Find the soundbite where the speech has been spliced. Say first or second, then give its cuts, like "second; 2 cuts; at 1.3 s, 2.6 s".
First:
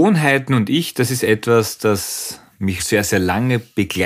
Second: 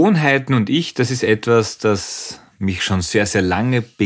first; 1 cut; at 2.8 s